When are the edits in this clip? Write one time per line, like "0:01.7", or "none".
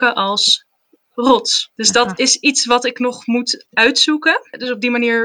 none